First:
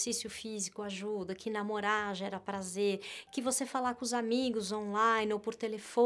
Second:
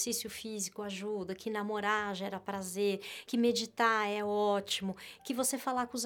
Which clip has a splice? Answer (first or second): first